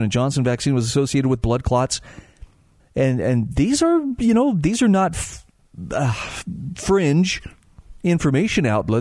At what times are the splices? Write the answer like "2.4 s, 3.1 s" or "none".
2.8 s